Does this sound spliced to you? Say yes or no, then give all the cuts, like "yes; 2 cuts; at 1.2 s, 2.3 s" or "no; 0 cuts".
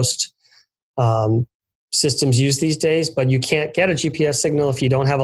no; 0 cuts